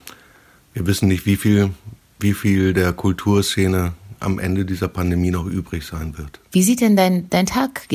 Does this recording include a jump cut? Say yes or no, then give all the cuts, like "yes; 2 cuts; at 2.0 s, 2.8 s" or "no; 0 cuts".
no; 0 cuts